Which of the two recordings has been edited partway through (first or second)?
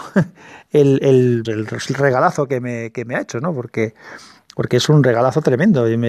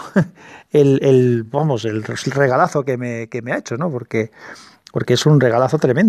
first